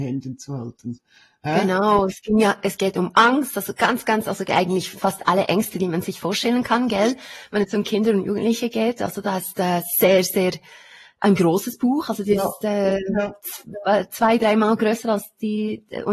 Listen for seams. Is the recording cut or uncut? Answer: uncut